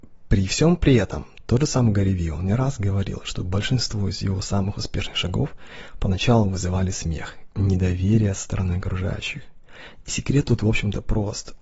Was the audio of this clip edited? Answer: no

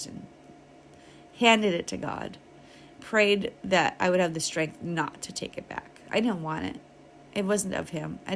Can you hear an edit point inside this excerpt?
no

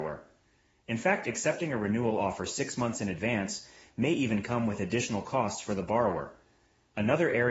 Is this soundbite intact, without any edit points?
yes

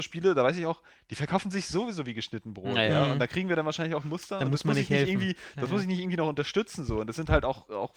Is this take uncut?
yes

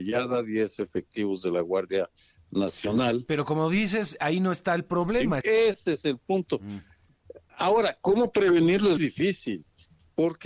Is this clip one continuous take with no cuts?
no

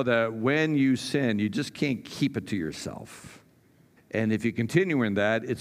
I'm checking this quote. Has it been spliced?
yes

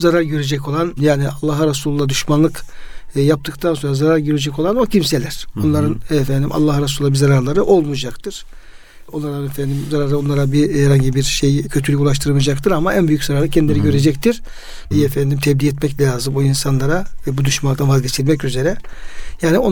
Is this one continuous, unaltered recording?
no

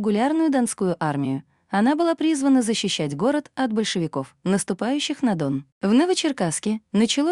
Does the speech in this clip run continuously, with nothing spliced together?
no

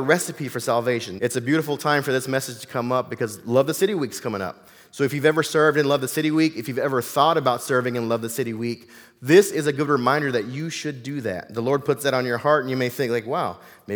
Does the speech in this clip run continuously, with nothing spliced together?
no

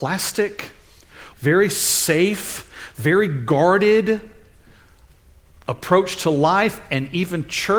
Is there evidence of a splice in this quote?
yes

